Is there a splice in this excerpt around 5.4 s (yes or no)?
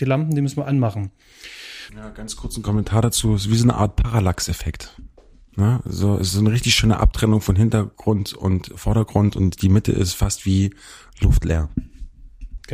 no